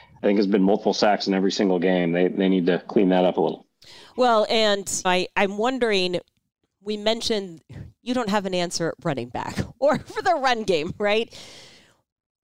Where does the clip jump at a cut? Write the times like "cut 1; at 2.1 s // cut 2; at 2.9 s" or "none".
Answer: cut 1; at 5.0 s // cut 2; at 7.9 s

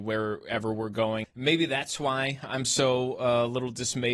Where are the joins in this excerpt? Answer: cut 1; at 1.2 s

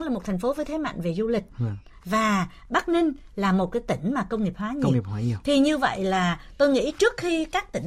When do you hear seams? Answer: none

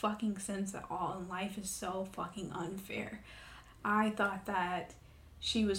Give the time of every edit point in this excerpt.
cut 1; at 3.7 s

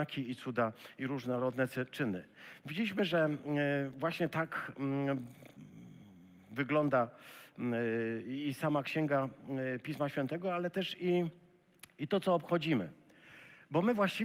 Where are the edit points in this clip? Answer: none

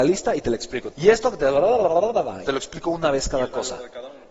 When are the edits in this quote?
cut 1; at 0.9 s // cut 2; at 2.4 s

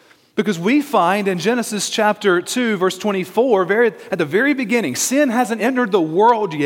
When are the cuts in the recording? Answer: cut 1; at 5.6 s

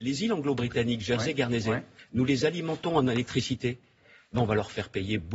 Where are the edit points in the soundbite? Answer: none

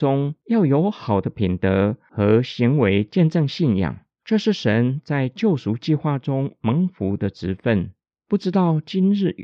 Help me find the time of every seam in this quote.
none

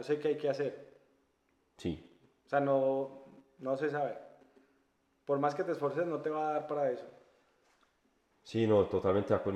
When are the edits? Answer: none

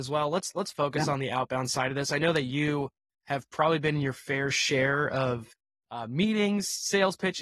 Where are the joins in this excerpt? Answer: none

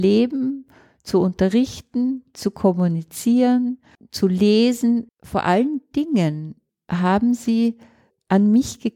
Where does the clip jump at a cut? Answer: cut 1; at 4.0 s // cut 2; at 5.1 s

